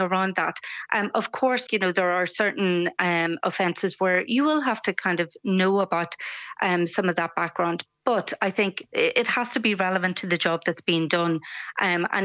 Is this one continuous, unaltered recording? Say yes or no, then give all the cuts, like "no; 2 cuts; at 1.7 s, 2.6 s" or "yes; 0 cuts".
no; 1 cut; at 1.7 s